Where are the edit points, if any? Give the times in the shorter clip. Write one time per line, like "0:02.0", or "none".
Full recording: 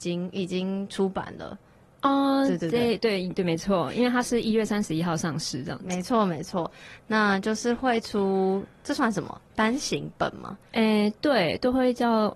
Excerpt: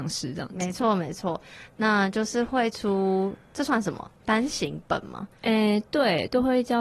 none